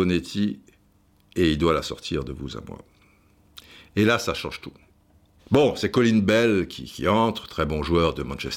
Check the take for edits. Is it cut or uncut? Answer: cut